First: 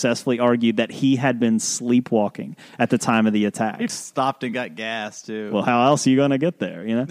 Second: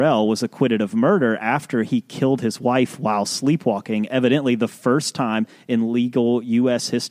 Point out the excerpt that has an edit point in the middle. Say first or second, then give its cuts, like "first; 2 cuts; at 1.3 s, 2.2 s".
first; 1 cut; at 3.9 s